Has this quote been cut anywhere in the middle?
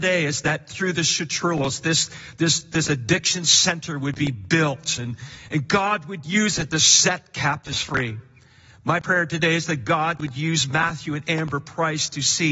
no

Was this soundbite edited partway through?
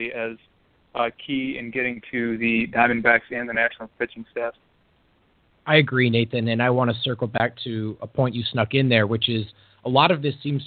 no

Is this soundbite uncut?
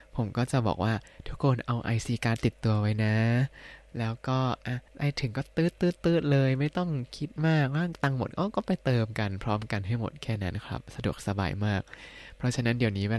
no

